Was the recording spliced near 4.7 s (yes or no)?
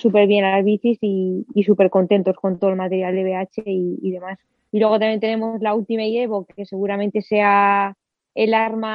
yes